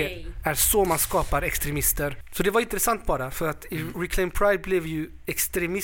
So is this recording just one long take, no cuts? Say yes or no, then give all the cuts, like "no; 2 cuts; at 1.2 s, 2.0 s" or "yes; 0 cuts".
yes; 0 cuts